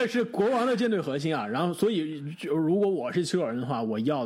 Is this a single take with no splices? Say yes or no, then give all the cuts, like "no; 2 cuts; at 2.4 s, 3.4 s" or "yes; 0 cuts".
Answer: yes; 0 cuts